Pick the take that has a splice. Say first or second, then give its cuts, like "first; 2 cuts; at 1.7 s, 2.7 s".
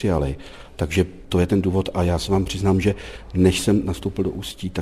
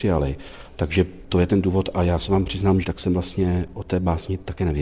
second; 1 cut; at 2.8 s